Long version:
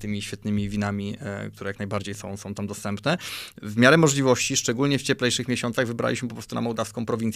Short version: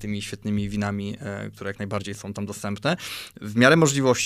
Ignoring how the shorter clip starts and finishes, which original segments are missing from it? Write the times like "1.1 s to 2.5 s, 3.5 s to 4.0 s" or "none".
2.2 s to 2.4 s